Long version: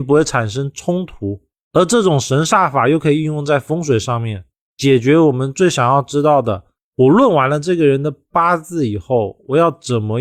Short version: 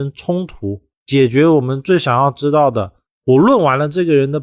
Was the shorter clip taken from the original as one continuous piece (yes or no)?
no